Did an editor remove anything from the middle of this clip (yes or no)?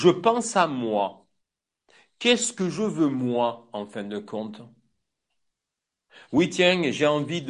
no